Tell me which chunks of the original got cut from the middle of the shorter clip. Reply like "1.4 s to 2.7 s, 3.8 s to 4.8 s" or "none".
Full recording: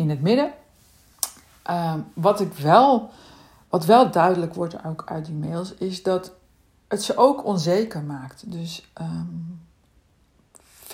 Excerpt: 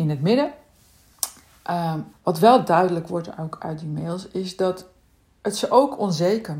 2.1 s to 3.6 s